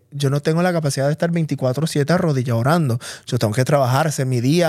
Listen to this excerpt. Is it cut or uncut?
uncut